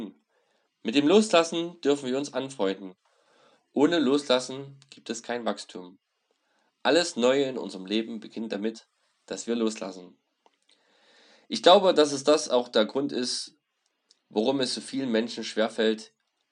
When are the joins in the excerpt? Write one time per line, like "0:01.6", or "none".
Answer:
none